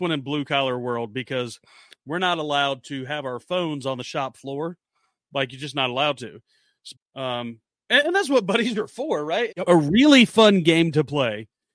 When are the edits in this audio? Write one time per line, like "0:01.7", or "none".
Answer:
0:06.9
0:09.5